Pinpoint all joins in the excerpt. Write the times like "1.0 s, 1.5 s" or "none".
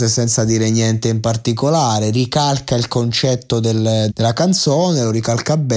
4.1 s